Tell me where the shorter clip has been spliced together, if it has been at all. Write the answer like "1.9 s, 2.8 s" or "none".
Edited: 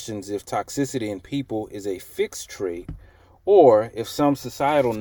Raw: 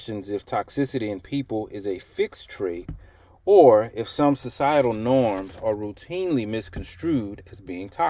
none